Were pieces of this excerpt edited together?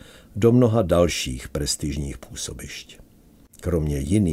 no; 0 cuts

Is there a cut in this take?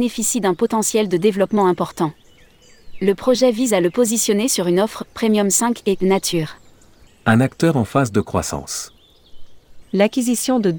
yes; 2 cuts; at 7.1 s, 9.8 s

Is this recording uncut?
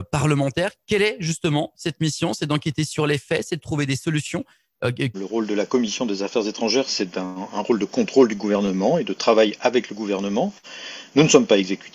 no; 1 cut; at 5.1 s

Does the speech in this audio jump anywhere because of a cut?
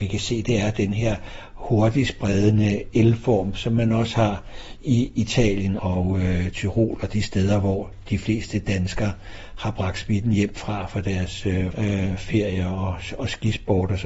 yes; 2 cuts; at 5.8 s, 11.7 s

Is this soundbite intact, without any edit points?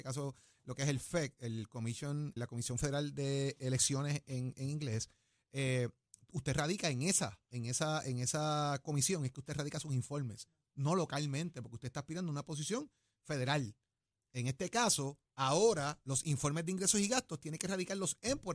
no; 1 cut; at 2.4 s

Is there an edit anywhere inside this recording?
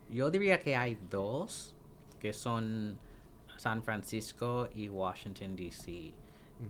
no; 0 cuts

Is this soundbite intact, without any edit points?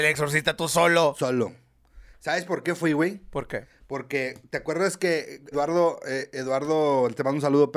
no; 1 cut; at 5.5 s

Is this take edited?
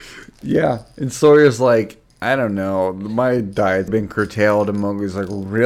yes; 2 cuts; at 2.1 s, 3.9 s

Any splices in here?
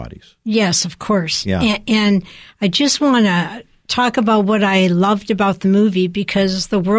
no; 0 cuts

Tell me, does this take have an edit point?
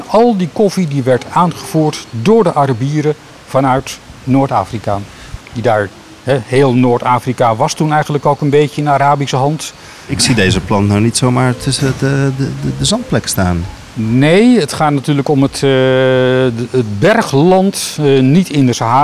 yes; 2 cuts; at 5.4 s, 10.1 s

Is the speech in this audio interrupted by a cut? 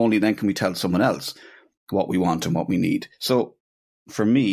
no; 0 cuts

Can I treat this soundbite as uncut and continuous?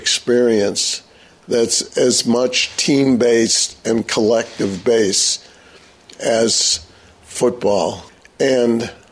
yes; 0 cuts

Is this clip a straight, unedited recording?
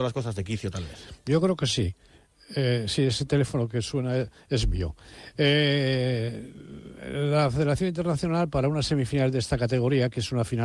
yes; 0 cuts

